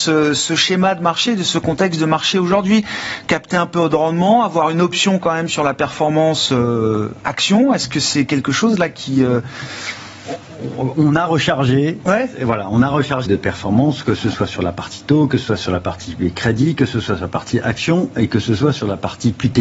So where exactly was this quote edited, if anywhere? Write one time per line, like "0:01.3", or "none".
0:12.1
0:13.3